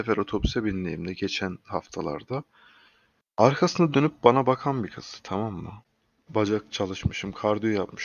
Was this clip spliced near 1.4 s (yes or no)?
no